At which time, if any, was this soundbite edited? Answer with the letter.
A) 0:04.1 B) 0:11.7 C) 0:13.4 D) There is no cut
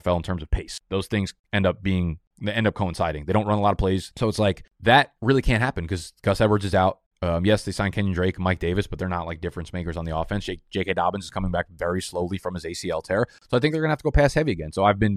A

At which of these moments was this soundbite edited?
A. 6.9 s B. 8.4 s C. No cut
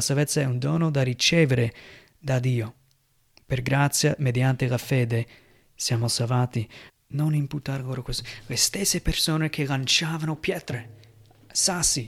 A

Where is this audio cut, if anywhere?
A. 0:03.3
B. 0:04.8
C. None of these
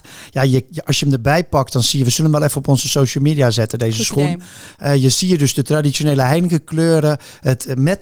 C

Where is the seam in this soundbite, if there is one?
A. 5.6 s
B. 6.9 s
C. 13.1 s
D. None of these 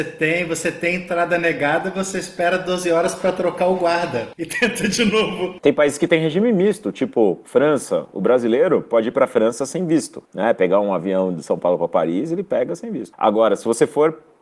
D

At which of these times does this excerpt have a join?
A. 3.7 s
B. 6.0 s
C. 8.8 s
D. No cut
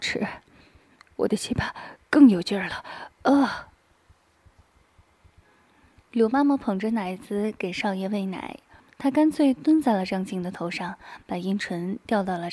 C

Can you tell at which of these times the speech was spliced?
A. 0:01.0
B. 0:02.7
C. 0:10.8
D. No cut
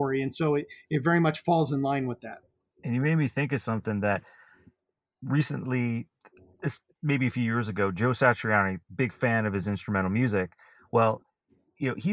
B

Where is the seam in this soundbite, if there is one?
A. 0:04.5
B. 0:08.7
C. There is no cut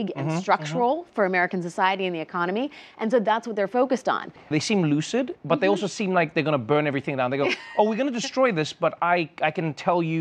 A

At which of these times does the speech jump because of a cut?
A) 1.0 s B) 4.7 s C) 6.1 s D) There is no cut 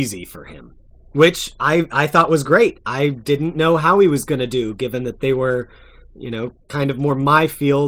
A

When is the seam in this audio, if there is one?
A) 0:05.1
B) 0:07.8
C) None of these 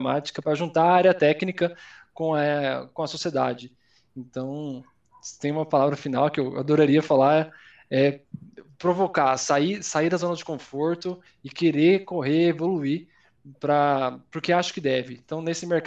C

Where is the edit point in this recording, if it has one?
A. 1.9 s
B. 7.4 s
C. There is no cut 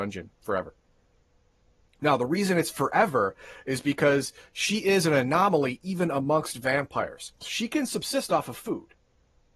B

